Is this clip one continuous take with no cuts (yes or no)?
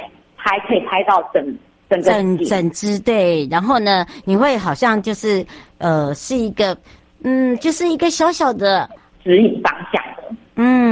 no